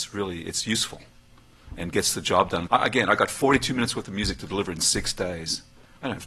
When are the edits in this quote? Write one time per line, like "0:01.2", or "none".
0:02.7

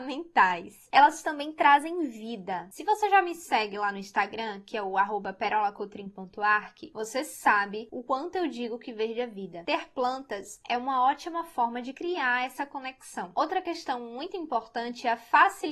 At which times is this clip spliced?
0:09.6

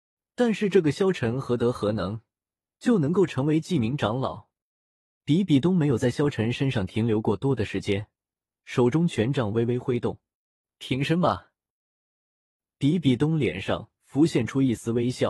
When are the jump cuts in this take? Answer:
0:05.2

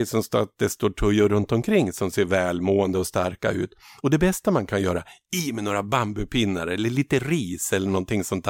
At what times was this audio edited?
none

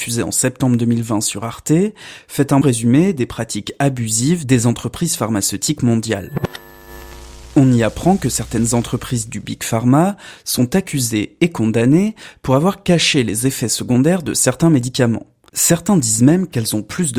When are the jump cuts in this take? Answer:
0:02.6
0:15.5

